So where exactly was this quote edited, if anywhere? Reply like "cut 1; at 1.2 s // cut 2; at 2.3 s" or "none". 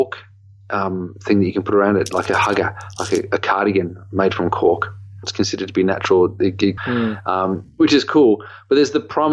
cut 1; at 5.2 s // cut 2; at 6.8 s